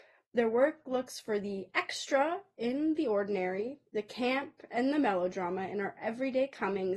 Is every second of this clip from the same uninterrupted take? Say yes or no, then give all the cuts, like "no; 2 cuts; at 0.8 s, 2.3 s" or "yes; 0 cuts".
yes; 0 cuts